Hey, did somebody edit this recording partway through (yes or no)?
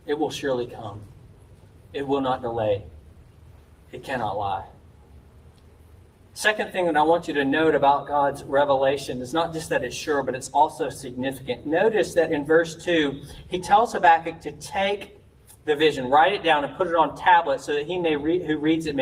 no